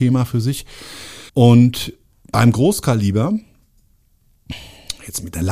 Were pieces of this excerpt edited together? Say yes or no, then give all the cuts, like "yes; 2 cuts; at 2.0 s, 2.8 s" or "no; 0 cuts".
yes; 1 cut; at 1.3 s